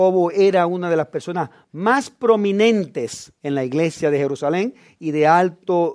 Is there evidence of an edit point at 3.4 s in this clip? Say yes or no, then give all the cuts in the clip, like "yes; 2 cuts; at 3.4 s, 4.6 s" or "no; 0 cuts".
yes; 1 cut; at 3.4 s